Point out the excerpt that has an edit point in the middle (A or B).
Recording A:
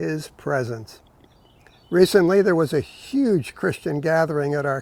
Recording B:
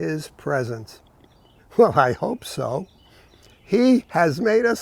B